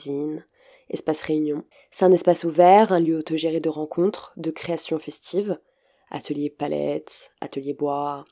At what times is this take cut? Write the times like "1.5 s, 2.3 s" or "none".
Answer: none